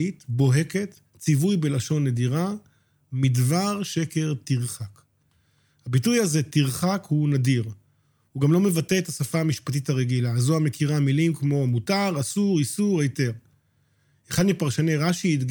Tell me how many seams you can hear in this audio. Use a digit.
0